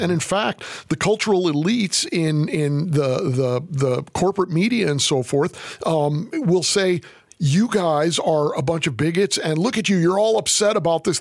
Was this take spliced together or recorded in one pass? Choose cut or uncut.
uncut